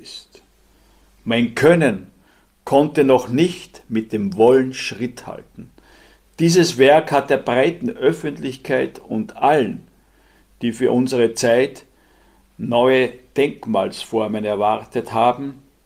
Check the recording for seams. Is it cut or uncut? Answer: uncut